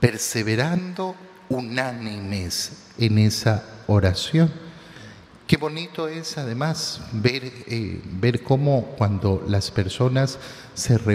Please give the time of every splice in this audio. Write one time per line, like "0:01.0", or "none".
none